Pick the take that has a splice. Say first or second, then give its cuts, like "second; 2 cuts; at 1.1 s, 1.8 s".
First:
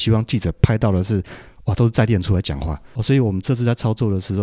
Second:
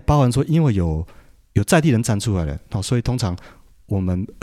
first; 1 cut; at 3.0 s